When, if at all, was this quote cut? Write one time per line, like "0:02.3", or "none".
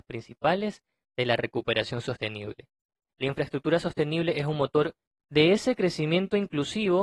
0:03.1